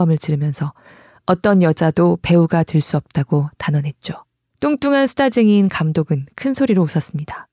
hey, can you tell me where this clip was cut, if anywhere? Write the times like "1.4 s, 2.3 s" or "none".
4.5 s